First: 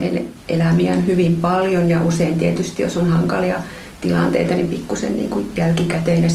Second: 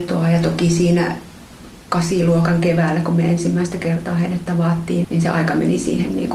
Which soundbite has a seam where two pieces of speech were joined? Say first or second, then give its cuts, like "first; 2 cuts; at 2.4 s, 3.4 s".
second; 1 cut; at 5.0 s